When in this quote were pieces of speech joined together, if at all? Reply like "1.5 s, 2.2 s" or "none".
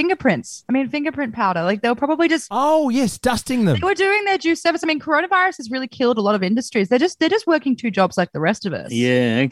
none